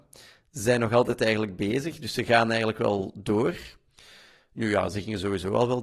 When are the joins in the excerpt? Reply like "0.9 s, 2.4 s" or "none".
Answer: none